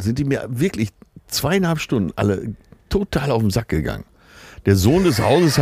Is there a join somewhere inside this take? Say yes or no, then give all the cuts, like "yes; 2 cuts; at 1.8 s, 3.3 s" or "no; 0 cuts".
no; 0 cuts